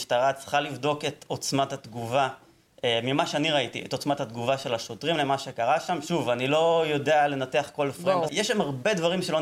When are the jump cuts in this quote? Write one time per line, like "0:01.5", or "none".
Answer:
0:08.3